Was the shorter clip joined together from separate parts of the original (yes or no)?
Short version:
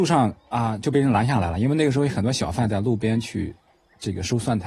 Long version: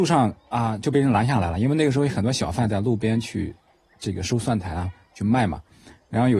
no